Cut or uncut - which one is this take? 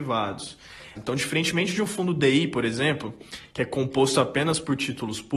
cut